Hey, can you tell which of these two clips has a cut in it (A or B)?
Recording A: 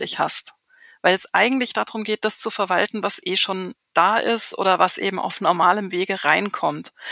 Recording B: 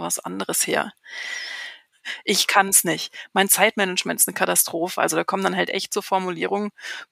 B